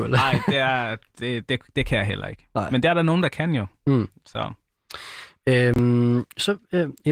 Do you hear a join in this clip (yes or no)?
no